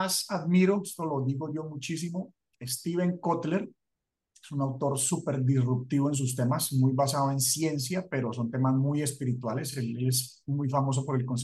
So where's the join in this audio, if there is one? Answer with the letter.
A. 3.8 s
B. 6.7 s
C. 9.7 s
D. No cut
D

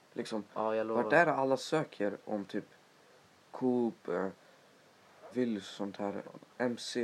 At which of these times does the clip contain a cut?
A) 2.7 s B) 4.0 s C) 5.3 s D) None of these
C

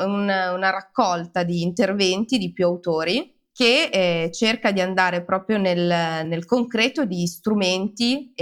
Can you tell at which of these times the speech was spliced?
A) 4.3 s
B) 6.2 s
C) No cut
B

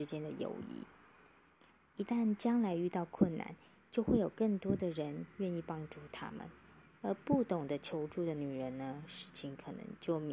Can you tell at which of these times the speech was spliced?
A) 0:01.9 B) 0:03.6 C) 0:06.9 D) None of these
D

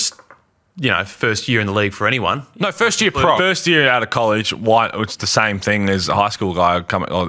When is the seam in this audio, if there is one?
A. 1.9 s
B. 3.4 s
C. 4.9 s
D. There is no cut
B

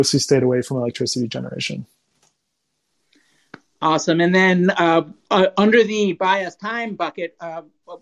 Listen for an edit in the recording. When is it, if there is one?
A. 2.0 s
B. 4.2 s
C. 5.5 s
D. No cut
D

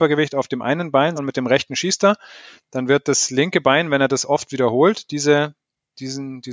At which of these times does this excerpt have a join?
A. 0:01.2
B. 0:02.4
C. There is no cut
A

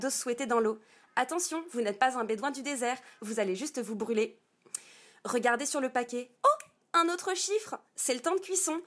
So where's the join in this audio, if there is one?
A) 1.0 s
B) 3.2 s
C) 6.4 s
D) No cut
B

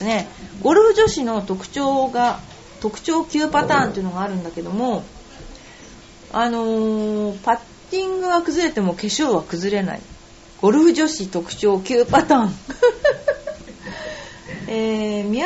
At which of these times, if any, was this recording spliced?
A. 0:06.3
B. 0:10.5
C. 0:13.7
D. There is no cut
D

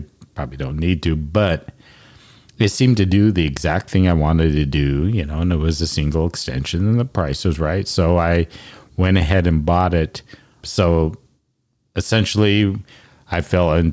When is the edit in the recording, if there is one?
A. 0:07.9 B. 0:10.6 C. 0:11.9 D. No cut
B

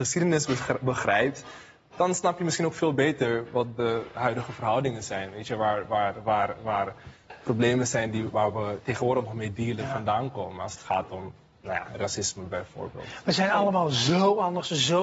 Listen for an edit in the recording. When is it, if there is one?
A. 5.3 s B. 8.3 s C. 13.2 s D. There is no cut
B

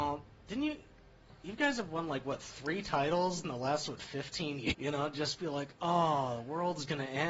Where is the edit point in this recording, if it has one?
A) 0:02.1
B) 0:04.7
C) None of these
B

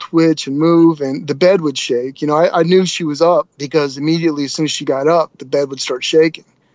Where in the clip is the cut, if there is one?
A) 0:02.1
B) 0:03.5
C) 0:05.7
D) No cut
B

